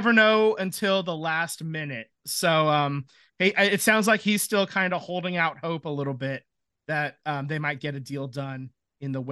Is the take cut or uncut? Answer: uncut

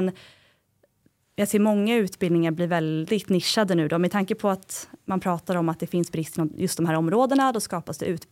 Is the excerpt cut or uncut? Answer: uncut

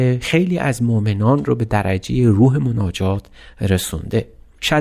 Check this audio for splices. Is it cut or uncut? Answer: uncut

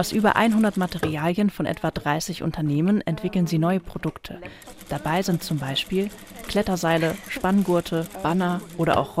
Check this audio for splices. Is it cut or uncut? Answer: uncut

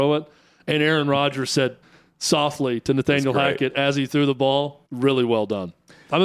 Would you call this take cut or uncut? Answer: cut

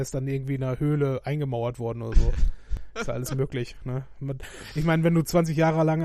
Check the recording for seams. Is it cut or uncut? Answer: uncut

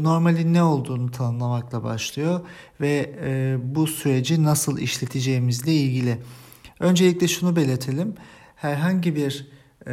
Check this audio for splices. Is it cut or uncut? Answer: uncut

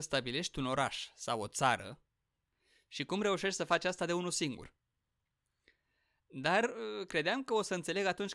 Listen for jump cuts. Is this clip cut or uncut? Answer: uncut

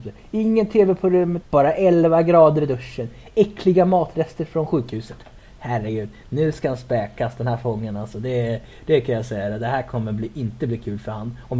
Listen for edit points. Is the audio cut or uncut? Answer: cut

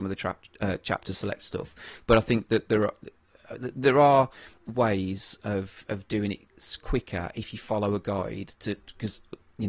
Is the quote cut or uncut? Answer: uncut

